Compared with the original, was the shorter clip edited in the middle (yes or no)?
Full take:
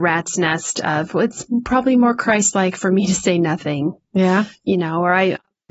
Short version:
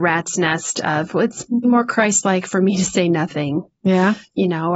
yes